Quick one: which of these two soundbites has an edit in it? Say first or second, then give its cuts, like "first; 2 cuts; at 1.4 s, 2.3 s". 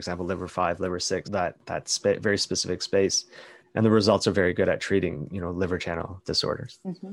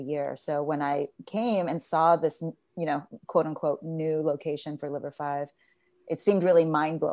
first; 2 cuts; at 1.2 s, 3.6 s